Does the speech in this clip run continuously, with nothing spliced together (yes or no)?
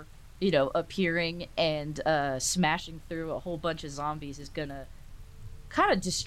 yes